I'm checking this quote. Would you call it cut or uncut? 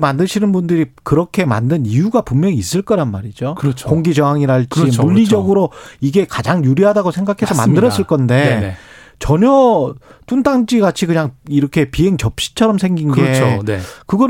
uncut